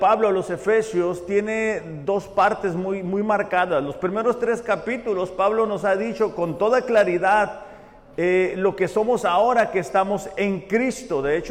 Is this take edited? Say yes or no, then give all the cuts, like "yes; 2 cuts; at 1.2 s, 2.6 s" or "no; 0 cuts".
no; 0 cuts